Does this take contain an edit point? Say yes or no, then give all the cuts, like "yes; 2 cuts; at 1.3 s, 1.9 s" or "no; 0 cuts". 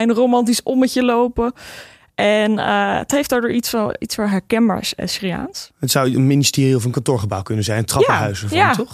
no; 0 cuts